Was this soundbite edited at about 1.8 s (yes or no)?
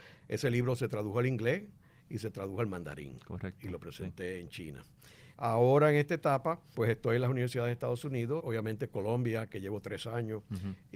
no